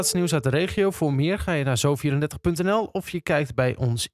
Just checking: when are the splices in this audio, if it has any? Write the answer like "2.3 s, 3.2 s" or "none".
none

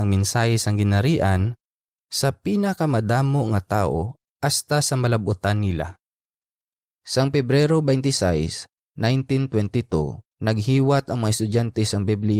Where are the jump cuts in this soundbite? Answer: 6.9 s, 10.3 s

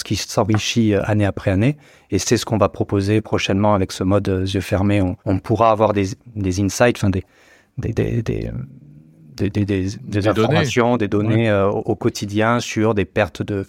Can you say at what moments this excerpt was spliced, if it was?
5.2 s

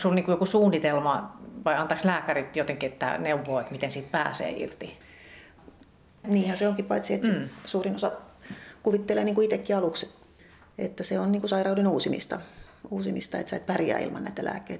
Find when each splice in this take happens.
6.2 s

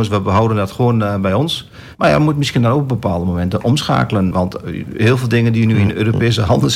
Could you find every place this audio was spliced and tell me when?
2.0 s, 4.3 s

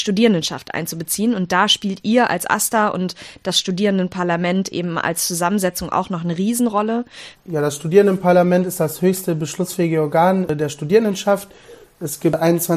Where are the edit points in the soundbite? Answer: 7.4 s

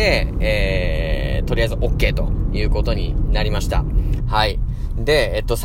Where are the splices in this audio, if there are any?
4.2 s

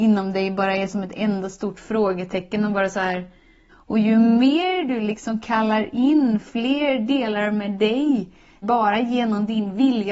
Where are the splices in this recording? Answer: 3.7 s, 8.6 s

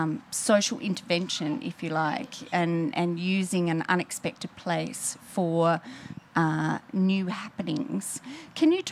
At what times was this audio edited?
none

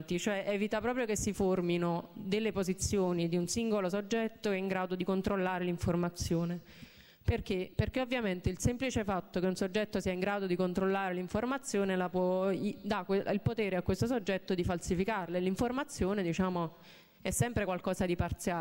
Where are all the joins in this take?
none

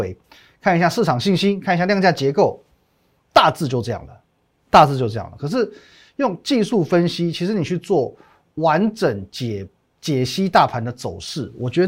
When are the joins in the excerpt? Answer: none

